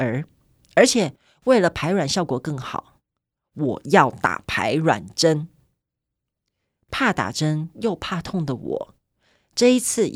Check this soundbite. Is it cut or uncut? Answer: uncut